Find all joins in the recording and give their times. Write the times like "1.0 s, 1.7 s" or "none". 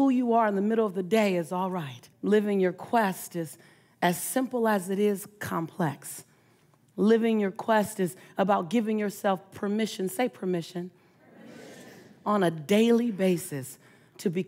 2.1 s